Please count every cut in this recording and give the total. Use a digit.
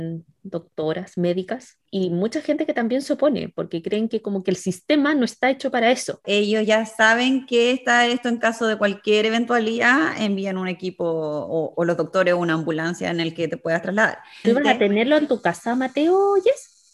2